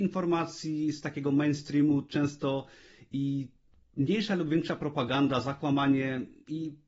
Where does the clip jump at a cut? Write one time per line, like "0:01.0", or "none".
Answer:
none